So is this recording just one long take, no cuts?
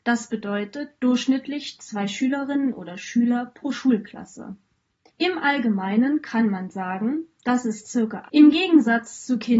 no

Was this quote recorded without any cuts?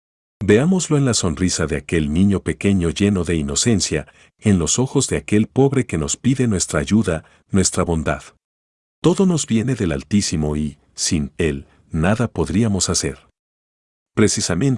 no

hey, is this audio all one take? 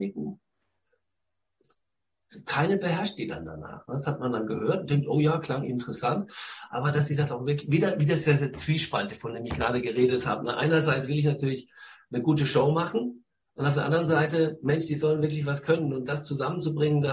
yes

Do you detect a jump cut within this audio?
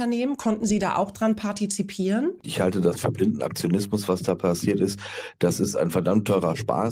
yes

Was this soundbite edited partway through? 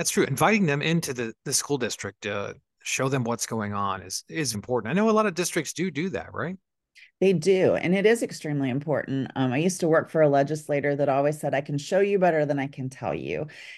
yes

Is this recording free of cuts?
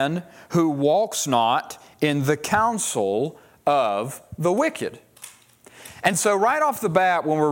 yes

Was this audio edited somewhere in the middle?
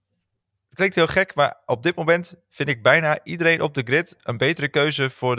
no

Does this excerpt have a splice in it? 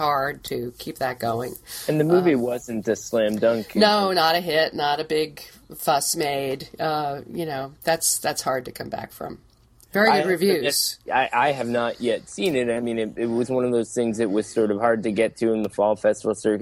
no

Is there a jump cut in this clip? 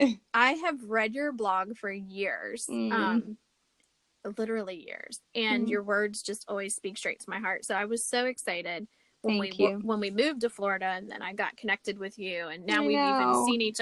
no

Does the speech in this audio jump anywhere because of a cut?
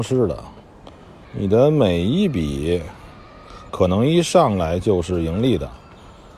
yes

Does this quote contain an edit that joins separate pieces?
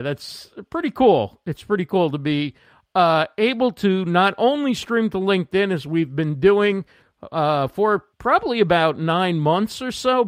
yes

